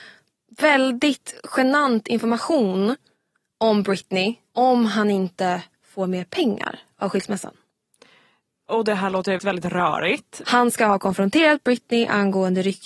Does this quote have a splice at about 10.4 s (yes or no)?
yes